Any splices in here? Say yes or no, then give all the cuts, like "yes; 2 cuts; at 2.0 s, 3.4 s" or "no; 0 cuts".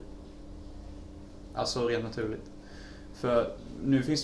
no; 0 cuts